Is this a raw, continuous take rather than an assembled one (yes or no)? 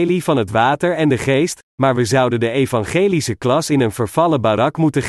yes